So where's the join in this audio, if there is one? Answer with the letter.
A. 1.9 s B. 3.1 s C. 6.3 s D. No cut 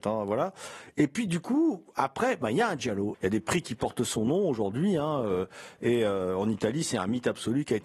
B